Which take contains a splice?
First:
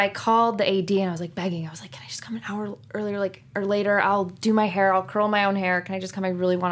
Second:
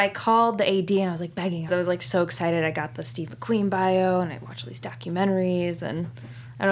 second; 1 cut; at 1.7 s

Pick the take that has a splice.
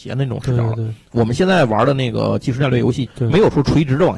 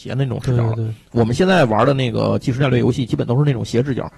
first; 1 cut; at 3.1 s

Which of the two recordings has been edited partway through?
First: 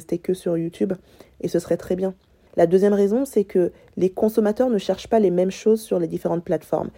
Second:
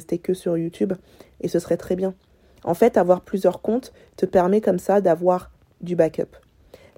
first; 1 cut; at 2.5 s

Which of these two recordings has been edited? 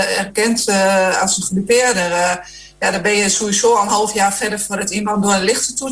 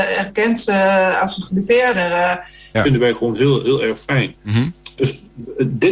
second; 2 cuts; at 2.7 s, 4.4 s

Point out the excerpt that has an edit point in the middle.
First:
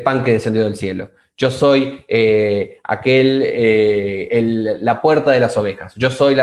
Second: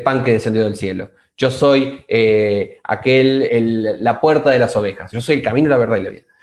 second; 2 cuts; at 3.5 s, 5.1 s

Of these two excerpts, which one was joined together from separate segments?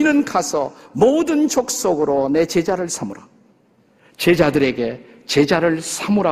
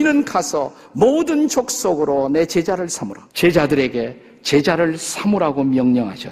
second; 1 cut; at 3.3 s

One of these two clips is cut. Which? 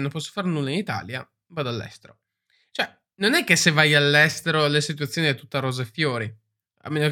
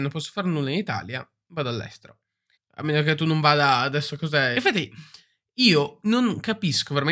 second; 2 cuts; at 2.5 s, 4.5 s

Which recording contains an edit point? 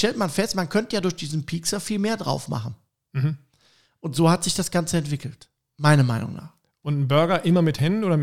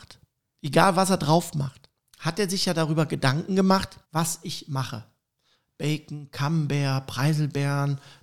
second; 1 cut; at 4.0 s

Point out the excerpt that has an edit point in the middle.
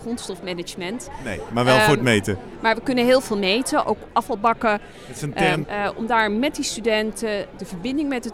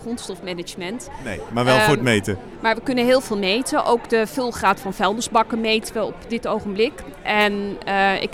first; 2 cuts; at 3.8 s, 5.6 s

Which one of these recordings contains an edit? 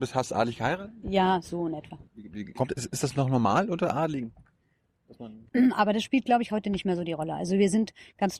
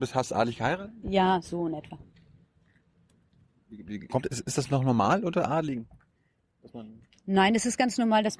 first; 2 cuts; at 2.1 s, 5.5 s

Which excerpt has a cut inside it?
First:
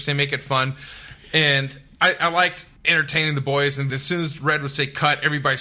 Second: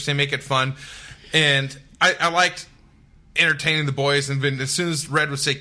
first; 2 cuts; at 2.8 s, 3.9 s

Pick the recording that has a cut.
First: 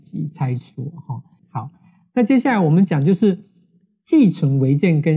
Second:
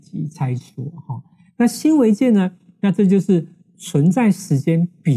first; 1 cut; at 1.4 s

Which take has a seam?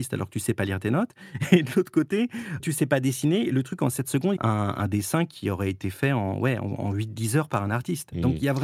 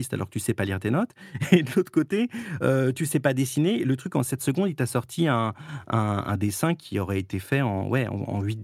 first; 2 cuts; at 2.6 s, 4.4 s

